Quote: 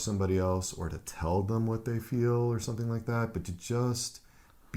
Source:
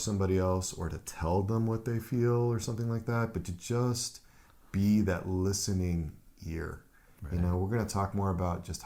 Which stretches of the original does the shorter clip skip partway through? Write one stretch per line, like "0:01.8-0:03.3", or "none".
none